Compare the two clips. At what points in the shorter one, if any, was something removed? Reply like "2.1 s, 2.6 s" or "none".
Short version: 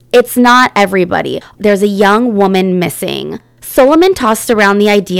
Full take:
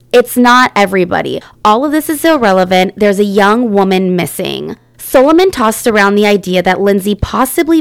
1.6 s